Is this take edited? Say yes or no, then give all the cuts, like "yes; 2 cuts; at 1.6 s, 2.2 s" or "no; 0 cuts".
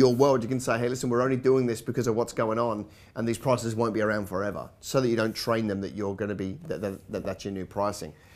no; 0 cuts